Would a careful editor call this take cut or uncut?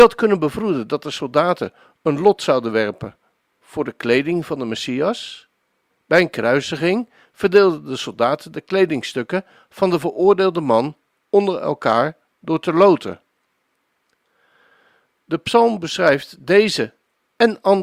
cut